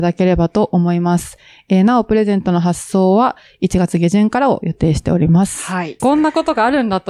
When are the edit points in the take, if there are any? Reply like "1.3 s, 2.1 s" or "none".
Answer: 6.0 s